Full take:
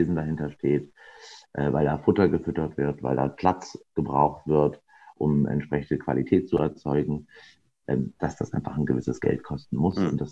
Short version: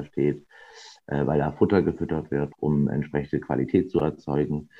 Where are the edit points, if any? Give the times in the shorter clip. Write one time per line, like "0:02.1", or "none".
0:02.5

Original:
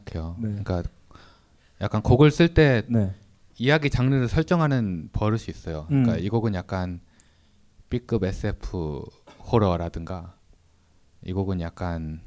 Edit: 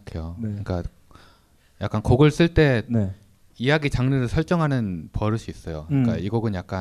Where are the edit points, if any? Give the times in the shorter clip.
none

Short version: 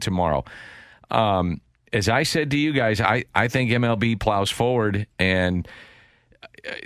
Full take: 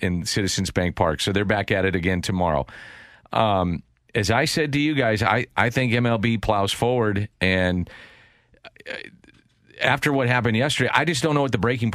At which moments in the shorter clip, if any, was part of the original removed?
none

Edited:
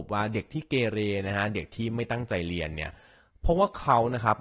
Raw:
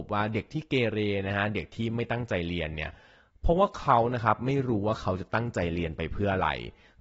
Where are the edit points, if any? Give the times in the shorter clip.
none

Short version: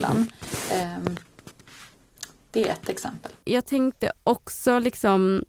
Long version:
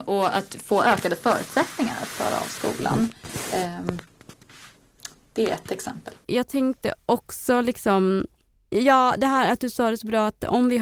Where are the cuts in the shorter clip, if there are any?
none

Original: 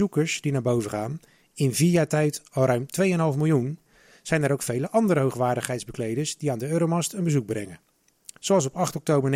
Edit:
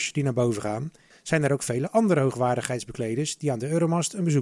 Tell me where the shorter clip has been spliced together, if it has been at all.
0:01.1

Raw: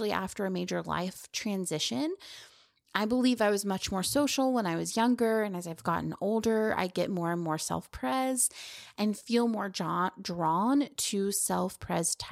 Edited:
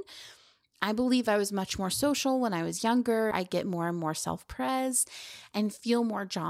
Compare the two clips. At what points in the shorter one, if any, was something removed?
0:03.3

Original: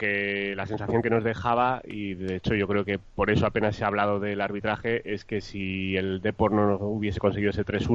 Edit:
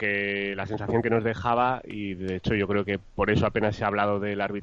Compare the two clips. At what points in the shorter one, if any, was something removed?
none

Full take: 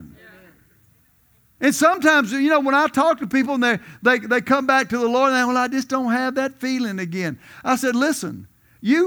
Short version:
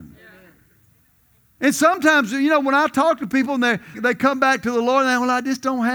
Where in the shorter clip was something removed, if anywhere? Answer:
0:03.9

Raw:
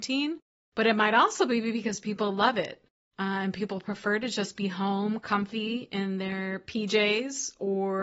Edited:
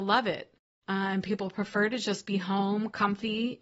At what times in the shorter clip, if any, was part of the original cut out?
none

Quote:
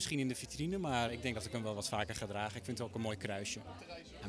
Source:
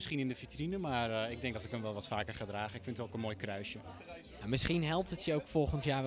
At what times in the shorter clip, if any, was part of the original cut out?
0:01.1

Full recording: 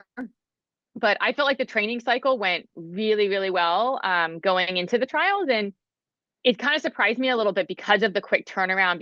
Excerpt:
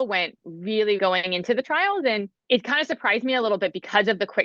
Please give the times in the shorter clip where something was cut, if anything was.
0:01.0
0:02.4

